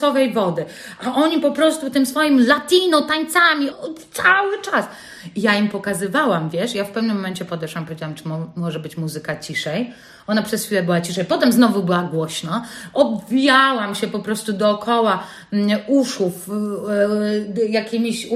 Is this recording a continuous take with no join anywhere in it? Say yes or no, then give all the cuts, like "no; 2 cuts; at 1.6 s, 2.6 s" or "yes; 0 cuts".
no; 1 cut; at 3.7 s